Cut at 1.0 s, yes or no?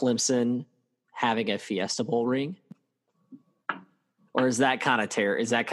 no